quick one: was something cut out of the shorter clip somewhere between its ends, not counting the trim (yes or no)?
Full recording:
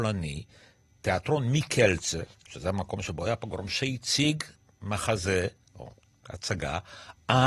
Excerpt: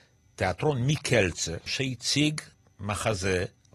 yes